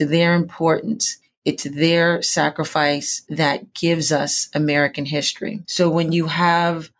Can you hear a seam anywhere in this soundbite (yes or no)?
yes